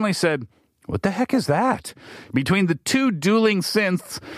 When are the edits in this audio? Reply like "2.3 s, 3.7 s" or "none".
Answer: 2.3 s